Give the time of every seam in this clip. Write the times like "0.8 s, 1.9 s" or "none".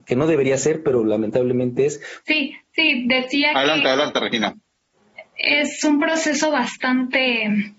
2.2 s